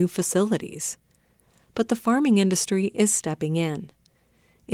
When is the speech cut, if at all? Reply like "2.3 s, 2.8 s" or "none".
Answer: none